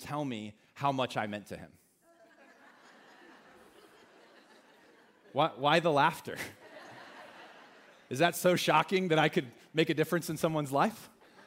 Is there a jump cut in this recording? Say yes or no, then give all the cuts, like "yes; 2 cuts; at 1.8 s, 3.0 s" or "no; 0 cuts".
no; 0 cuts